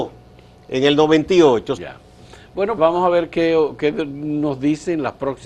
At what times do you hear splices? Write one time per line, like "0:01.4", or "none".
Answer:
0:01.8
0:02.8